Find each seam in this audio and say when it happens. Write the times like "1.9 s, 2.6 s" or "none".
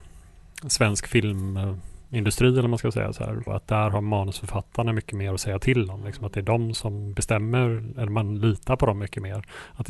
3.5 s